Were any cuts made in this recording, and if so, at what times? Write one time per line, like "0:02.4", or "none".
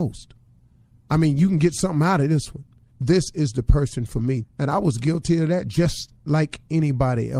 0:02.9
0:04.4